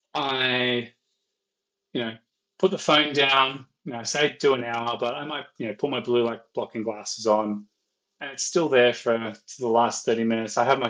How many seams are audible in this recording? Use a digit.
0